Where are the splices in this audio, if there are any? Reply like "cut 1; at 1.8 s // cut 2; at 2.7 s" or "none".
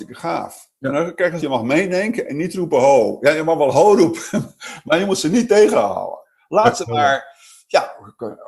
cut 1; at 1.4 s